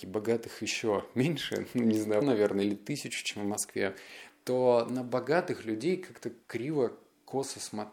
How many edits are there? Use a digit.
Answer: 2